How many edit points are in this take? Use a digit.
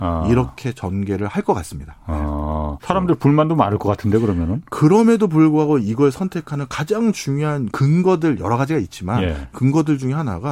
1